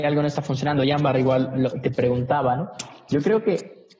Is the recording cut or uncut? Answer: uncut